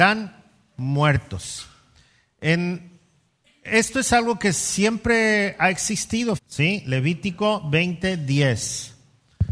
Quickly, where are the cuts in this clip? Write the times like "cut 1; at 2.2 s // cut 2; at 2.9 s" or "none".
cut 1; at 6.4 s